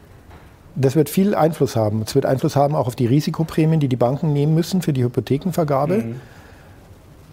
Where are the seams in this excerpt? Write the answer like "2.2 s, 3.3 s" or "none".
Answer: none